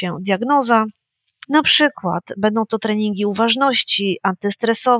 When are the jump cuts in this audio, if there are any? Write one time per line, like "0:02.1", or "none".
0:01.4

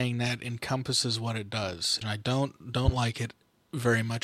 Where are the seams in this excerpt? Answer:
0:02.0

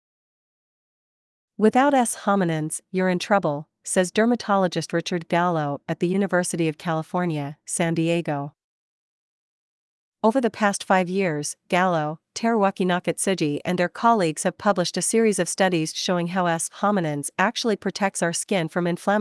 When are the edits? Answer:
none

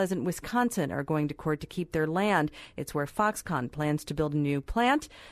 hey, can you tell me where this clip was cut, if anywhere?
none

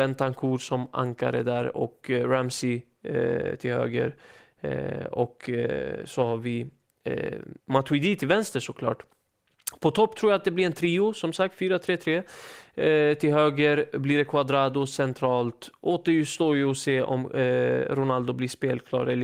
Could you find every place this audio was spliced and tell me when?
0:07.6

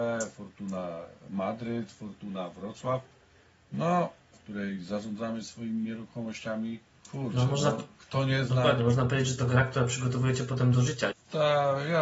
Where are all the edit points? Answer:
0:04.3
0:07.0
0:11.1

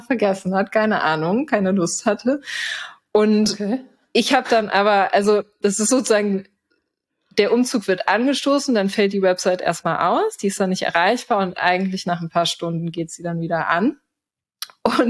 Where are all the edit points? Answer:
none

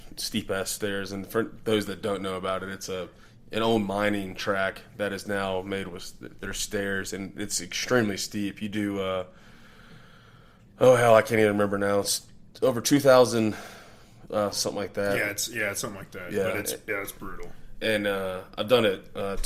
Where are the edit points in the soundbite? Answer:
0:14.5

